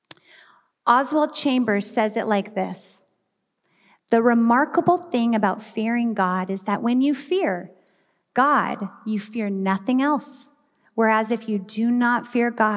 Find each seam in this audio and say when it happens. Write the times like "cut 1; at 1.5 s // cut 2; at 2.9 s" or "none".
none